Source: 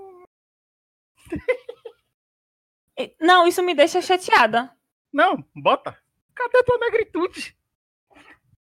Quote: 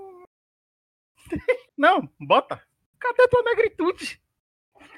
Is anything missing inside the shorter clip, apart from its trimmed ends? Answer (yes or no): yes